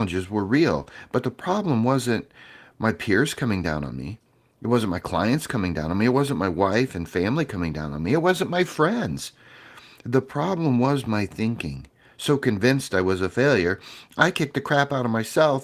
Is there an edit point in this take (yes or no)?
no